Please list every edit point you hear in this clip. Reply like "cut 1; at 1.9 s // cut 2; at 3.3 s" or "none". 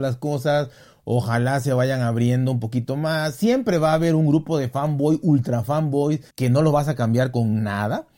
cut 1; at 6.3 s